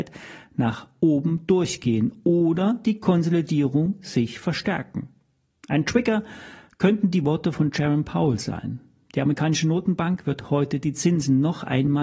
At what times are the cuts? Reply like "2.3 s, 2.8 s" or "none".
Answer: none